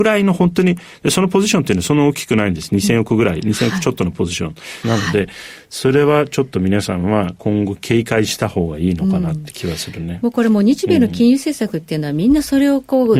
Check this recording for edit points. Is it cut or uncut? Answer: cut